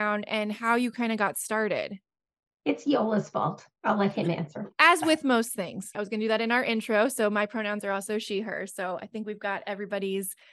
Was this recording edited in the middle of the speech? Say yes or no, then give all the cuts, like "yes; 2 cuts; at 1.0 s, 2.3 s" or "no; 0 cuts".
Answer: yes; 1 cut; at 5.9 s